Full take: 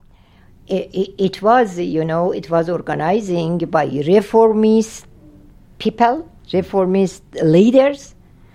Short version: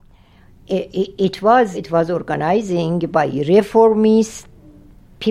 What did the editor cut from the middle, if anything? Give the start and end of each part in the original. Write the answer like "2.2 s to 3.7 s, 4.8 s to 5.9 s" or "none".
1.7 s to 2.3 s